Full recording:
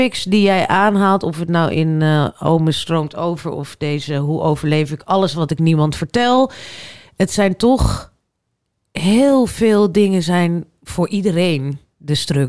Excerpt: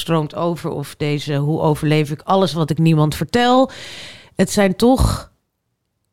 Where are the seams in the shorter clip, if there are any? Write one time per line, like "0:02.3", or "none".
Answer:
none